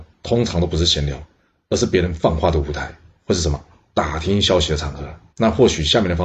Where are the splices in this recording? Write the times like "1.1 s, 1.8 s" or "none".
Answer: 5.3 s